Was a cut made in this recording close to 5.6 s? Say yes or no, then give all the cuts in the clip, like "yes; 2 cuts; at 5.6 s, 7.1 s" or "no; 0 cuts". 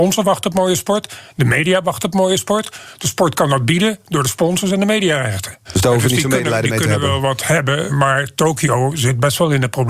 yes; 2 cuts; at 5.6 s, 7.9 s